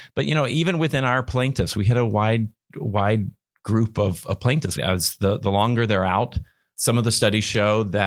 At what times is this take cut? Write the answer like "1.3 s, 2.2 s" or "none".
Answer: 4.8 s, 6.7 s